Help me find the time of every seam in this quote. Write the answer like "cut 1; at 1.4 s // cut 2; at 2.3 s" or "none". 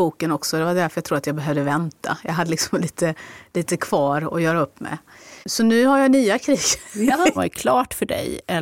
cut 1; at 5.4 s // cut 2; at 7.3 s